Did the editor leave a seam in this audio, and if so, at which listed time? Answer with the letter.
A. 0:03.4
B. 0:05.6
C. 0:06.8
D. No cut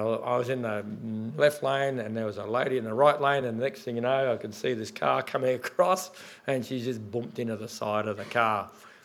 D